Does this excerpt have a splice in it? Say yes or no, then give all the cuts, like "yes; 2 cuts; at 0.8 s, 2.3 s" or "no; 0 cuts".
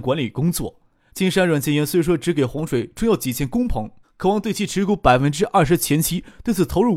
yes; 2 cuts; at 1.1 s, 4.0 s